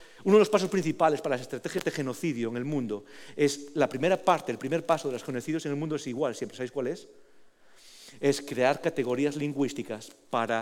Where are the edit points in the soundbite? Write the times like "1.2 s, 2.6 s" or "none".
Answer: none

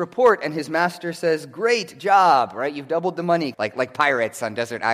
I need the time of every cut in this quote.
3.5 s

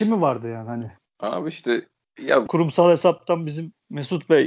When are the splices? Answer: 2.5 s

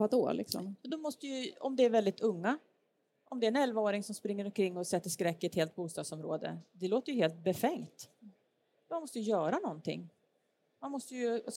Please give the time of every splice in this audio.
none

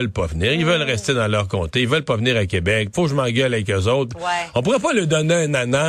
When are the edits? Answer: 2.9 s

